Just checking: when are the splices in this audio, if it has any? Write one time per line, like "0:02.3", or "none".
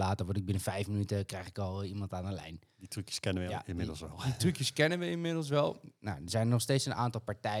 none